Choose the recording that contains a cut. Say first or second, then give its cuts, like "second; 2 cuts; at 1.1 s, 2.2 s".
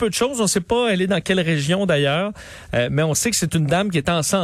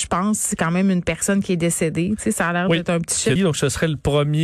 second; 1 cut; at 3.4 s